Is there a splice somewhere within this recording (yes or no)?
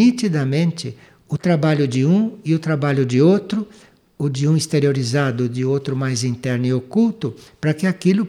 no